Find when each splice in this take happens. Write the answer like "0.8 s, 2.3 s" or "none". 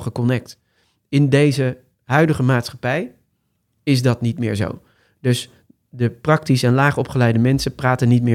none